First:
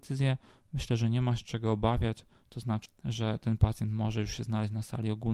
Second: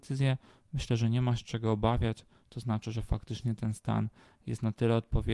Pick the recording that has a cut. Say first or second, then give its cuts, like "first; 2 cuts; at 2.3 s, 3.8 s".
first; 1 cut; at 2.9 s